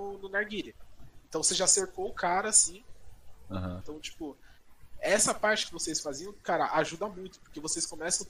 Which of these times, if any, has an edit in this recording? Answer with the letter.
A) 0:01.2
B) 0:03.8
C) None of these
B